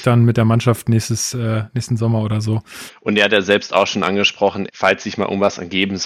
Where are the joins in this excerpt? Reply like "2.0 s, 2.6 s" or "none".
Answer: 2.9 s, 4.7 s